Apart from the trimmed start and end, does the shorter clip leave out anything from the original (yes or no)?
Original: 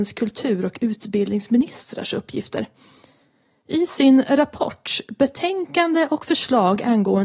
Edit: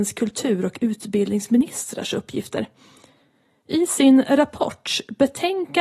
no